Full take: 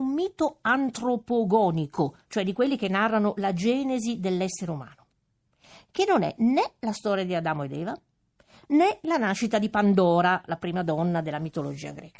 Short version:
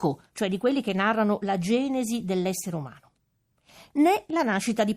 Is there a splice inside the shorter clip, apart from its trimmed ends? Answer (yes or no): yes